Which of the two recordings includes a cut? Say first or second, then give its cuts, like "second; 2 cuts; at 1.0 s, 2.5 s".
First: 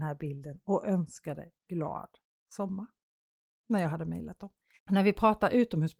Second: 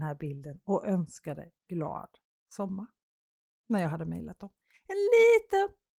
first; 1 cut; at 4.8 s